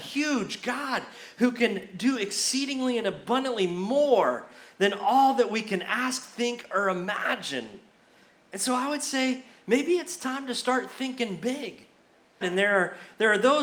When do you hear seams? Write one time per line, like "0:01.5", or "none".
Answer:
0:12.4